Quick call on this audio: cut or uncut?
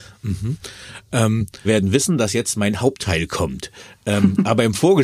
cut